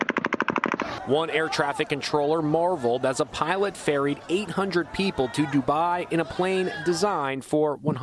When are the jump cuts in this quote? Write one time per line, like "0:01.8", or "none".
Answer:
0:01.0